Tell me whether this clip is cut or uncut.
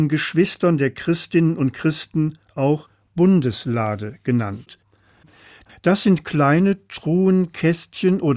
cut